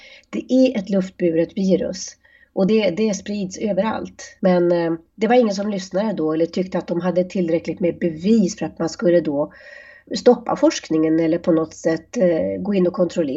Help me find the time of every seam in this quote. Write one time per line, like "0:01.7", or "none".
none

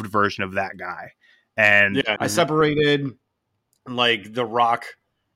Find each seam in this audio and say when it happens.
0:02.2

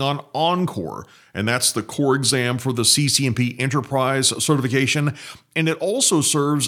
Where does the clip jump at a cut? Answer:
none

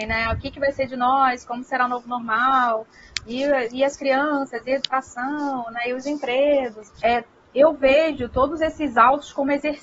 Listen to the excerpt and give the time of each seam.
0:06.9

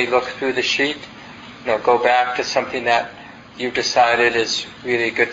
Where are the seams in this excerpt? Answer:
0:01.6

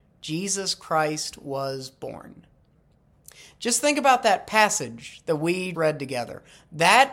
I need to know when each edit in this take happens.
0:05.7

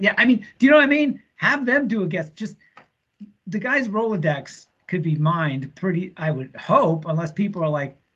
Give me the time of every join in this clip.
none

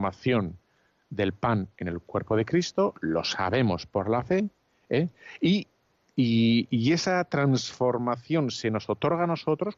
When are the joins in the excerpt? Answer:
none

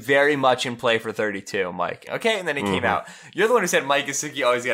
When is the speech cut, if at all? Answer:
0:02.1

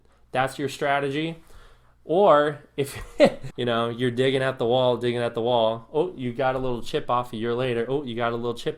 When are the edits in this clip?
0:03.5

